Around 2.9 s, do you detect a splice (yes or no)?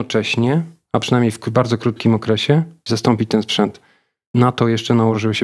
yes